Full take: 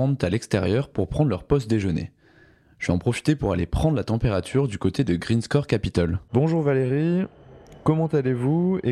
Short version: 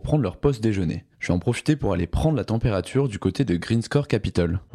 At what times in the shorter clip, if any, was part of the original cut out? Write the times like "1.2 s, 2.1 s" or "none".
1.1 s